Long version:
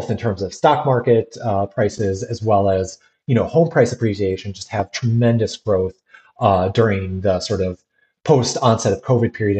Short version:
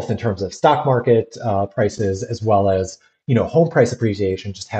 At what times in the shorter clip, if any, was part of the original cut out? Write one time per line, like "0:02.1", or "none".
none